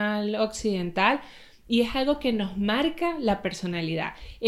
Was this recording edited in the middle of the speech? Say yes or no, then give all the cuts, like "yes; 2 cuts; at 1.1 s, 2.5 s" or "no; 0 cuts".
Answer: no; 0 cuts